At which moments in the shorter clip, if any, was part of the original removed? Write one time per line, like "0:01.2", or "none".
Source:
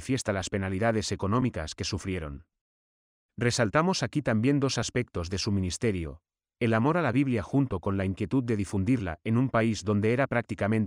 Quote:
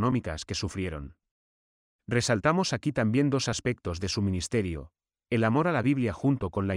none